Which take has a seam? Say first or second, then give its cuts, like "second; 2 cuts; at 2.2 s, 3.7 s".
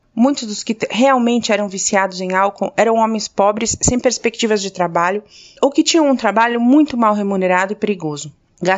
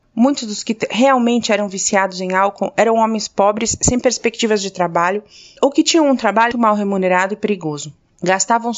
second; 1 cut; at 6.5 s